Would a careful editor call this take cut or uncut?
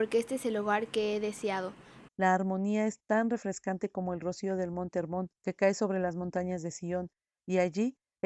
cut